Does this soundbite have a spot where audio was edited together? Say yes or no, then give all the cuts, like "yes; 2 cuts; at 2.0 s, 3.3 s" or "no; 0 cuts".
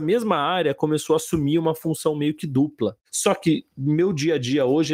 yes; 1 cut; at 3.0 s